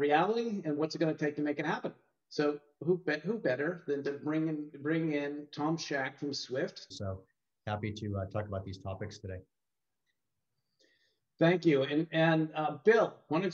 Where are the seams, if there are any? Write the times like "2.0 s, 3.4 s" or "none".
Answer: 6.9 s